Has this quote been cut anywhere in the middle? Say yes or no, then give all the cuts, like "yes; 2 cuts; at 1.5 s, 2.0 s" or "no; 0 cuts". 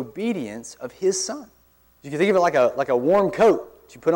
yes; 1 cut; at 1.9 s